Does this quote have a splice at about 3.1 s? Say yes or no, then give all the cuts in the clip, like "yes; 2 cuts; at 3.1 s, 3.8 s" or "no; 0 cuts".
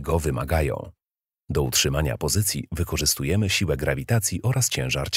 no; 1 cut; at 1.3 s